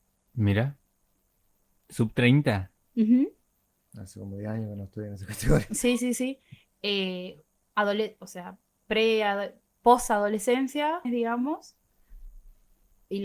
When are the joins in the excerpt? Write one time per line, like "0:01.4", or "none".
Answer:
0:06.7
0:11.0